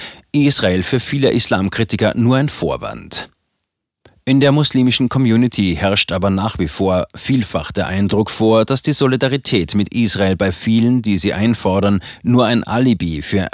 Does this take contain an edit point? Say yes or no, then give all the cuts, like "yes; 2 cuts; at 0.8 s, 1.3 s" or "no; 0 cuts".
no; 0 cuts